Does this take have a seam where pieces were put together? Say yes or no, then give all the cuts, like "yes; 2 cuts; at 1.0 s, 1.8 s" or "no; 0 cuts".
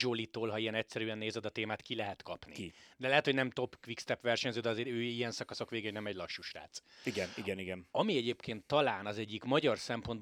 no; 0 cuts